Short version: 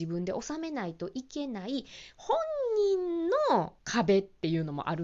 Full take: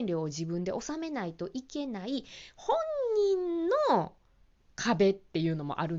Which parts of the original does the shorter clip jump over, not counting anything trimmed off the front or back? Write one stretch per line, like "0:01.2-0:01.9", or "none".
0:04.2-0:04.7